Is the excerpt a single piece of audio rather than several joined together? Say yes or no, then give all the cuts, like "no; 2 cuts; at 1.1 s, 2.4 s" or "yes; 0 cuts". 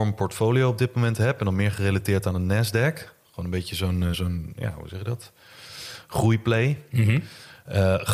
yes; 0 cuts